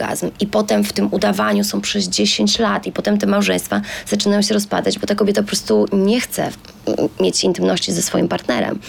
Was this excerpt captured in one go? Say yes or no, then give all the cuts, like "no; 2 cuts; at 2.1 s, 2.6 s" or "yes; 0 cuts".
yes; 0 cuts